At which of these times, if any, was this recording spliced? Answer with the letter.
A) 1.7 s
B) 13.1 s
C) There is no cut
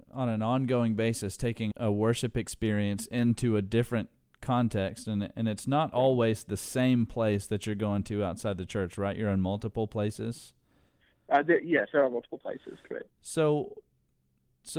A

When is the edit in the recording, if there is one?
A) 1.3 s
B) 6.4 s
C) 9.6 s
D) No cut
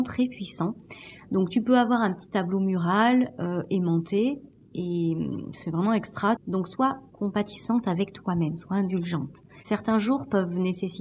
B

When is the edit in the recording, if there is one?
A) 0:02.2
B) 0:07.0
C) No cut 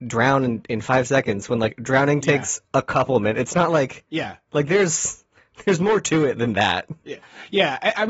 C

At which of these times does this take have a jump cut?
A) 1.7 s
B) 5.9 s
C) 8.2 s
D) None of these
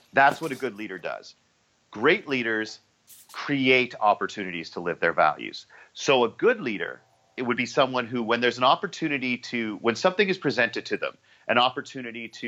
D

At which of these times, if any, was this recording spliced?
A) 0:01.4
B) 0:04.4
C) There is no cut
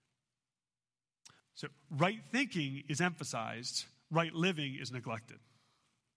A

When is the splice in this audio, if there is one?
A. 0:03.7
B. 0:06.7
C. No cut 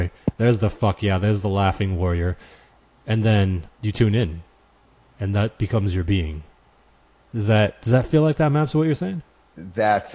A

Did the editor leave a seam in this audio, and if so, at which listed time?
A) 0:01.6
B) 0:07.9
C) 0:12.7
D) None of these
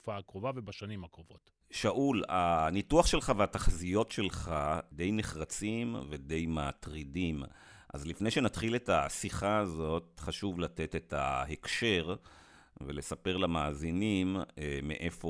D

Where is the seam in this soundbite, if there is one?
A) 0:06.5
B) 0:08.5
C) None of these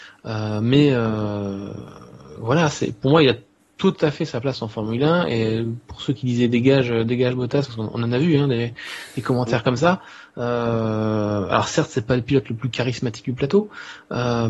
C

